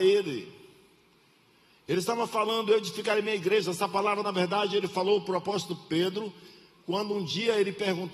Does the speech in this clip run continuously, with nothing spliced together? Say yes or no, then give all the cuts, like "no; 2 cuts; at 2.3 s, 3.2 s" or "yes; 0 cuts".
yes; 0 cuts